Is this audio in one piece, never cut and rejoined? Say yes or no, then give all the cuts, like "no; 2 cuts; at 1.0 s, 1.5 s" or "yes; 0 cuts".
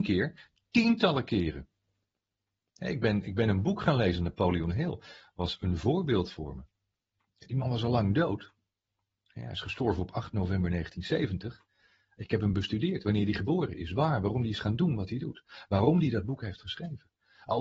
yes; 0 cuts